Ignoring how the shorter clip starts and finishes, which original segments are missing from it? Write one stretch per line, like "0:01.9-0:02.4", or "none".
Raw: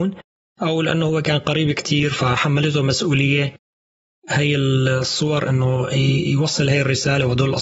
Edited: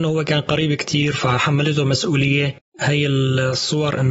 0:03.7-0:04.2